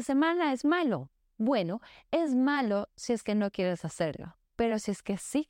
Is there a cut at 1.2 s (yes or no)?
no